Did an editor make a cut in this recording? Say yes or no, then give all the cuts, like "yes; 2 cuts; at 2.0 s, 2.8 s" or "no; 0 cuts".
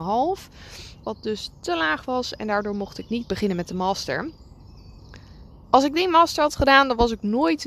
yes; 1 cut; at 1.0 s